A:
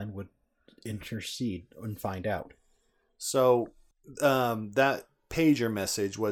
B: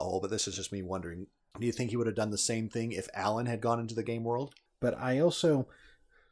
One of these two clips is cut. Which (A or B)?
B